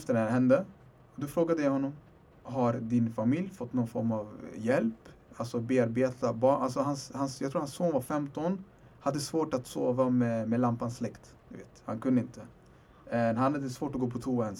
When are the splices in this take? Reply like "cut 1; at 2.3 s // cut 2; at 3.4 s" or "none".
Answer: cut 1; at 11.4 s